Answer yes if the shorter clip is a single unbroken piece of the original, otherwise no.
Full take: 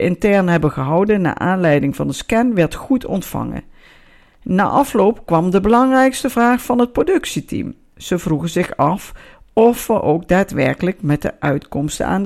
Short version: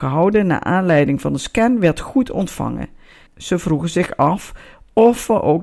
no